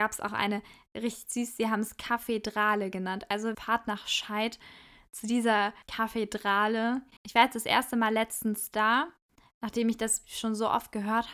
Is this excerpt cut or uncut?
cut